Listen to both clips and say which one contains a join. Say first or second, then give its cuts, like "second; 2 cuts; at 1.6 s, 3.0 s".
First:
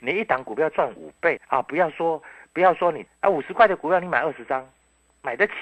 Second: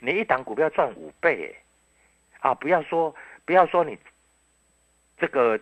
first; 2 cuts; at 1.4 s, 3.1 s